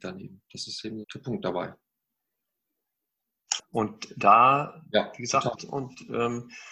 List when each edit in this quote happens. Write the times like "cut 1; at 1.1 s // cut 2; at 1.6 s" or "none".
cut 1; at 1.0 s // cut 2; at 3.6 s // cut 3; at 5.6 s